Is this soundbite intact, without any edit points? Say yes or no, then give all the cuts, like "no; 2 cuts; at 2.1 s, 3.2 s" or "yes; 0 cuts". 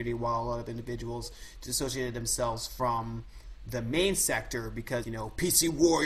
no; 1 cut; at 5.0 s